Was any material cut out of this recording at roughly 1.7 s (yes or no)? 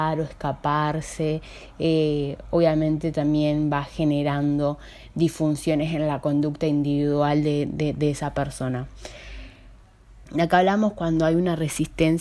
no